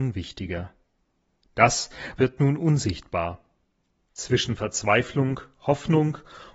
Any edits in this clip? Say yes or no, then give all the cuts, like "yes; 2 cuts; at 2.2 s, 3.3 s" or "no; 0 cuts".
yes; 2 cuts; at 2.2 s, 4.1 s